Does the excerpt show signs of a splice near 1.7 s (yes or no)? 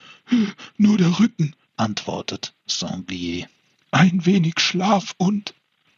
yes